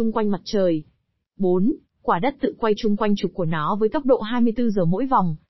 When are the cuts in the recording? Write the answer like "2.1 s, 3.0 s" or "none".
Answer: 1.3 s